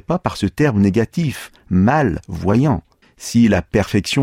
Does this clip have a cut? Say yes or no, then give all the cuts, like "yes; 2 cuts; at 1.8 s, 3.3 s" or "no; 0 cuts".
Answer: yes; 1 cut; at 3.0 s